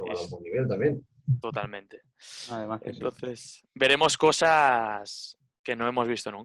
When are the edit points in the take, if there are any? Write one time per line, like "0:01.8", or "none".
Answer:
none